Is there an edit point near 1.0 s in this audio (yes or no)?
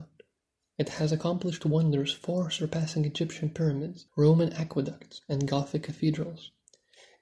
no